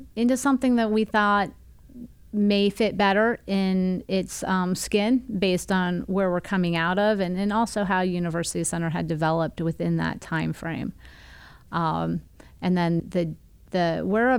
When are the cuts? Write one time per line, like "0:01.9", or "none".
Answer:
0:13.0